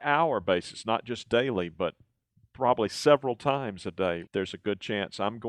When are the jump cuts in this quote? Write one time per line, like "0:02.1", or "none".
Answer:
0:04.3